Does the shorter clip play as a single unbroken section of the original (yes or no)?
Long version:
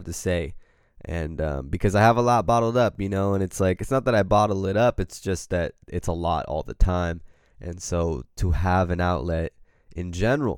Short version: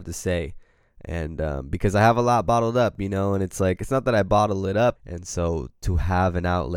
no